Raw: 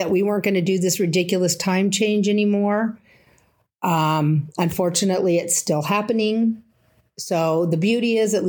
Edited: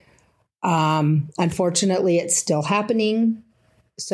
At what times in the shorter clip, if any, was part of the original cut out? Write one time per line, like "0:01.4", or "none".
none